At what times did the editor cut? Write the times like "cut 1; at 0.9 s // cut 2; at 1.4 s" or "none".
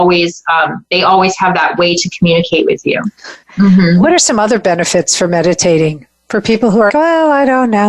cut 1; at 3.4 s // cut 2; at 6.9 s